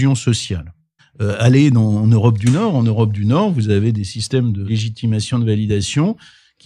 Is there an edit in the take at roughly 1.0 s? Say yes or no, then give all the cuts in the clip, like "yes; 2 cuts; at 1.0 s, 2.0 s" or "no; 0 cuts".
yes; 2 cuts; at 1.0 s, 5.3 s